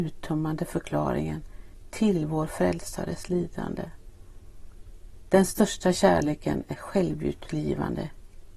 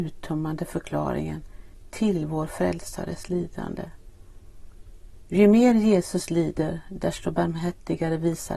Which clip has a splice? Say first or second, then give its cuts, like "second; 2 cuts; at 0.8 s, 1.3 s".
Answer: second; 1 cut; at 5.3 s